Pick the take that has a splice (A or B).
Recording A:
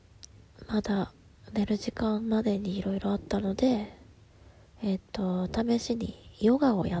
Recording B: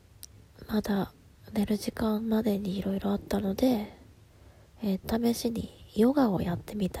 B